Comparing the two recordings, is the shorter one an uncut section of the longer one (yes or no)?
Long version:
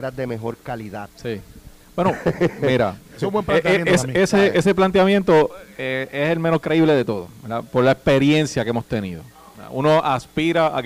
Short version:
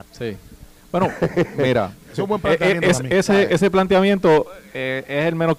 yes